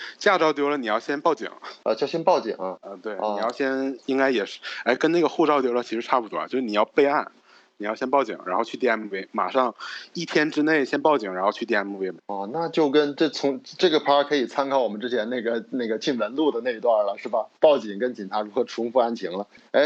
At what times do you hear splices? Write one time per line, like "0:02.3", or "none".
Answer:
none

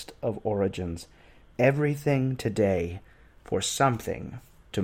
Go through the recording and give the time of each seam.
0:01.5

